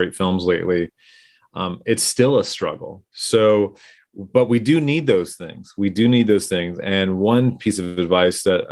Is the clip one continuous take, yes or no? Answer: yes